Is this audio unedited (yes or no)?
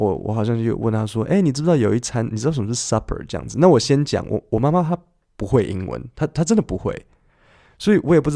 yes